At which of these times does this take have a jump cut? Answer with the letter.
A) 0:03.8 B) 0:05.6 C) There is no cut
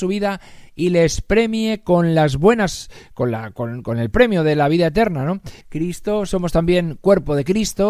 B